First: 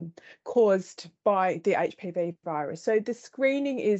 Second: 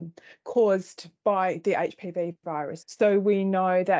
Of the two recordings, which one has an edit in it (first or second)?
second